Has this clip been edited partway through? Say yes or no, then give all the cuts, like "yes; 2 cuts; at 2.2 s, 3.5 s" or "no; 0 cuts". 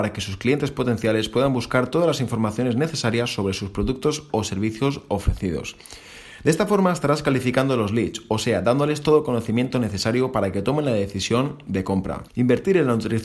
yes; 1 cut; at 12.3 s